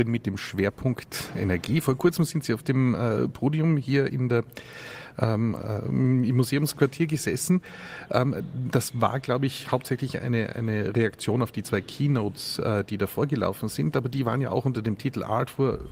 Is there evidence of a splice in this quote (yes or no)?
no